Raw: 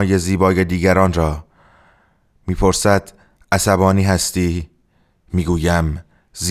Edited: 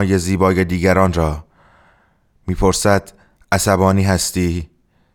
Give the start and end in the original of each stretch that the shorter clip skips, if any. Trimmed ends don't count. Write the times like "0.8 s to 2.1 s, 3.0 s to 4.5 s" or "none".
none